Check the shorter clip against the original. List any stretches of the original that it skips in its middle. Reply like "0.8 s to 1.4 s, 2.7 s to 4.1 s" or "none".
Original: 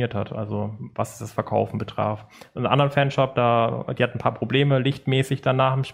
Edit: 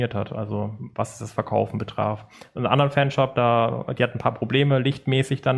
none